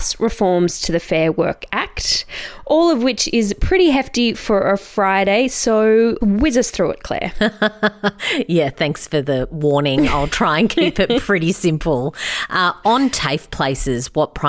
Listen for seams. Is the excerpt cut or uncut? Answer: uncut